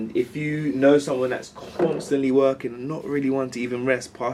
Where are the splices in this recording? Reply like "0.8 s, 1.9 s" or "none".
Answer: none